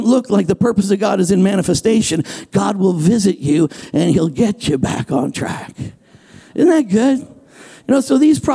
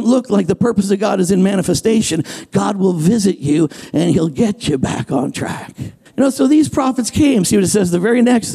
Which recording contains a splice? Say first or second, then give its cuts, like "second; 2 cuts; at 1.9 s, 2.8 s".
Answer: second; 2 cuts; at 6.1 s, 7.4 s